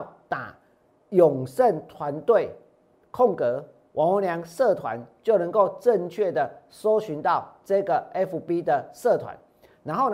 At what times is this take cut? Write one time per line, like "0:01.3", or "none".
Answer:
none

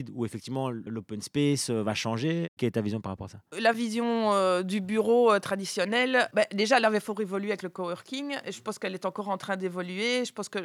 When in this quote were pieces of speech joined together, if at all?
none

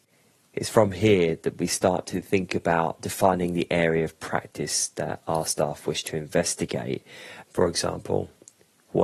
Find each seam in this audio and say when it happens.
0:07.4

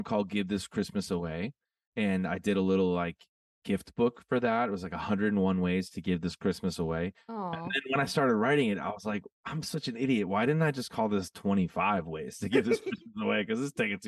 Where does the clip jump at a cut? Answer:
none

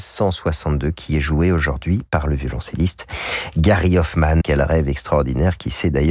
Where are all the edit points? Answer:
0:04.4

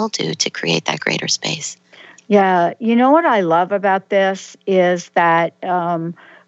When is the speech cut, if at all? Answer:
none

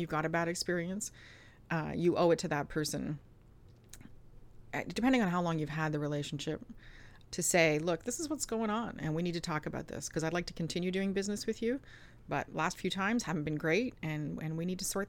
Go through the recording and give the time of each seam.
0:07.2

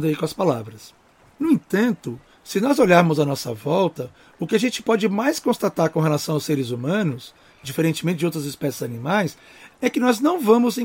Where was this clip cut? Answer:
none

